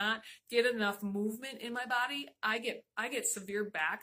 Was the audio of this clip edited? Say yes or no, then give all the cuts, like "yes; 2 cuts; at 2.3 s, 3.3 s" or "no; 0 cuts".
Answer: no; 0 cuts